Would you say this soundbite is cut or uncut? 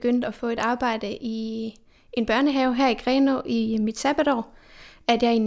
uncut